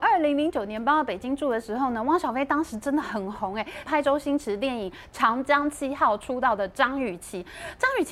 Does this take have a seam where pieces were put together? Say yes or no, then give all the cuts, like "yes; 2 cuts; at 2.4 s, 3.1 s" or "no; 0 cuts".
yes; 1 cut; at 3.8 s